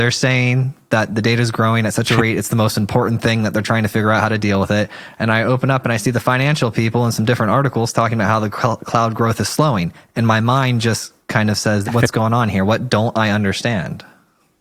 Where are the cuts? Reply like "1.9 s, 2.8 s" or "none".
11.8 s